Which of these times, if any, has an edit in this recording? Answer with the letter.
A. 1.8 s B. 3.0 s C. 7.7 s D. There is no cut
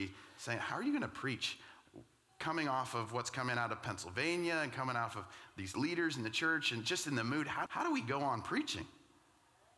C